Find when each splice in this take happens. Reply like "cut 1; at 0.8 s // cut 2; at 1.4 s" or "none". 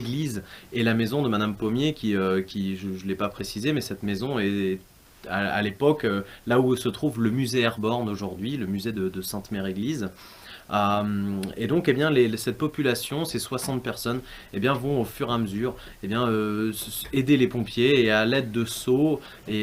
none